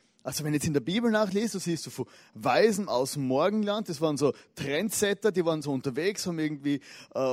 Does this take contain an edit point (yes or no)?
no